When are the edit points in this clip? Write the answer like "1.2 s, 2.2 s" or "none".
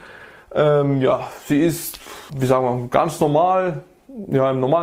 2.3 s